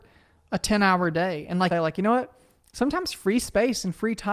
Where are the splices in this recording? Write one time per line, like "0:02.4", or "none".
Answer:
0:01.7